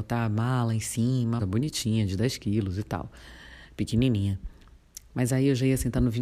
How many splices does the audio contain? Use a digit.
1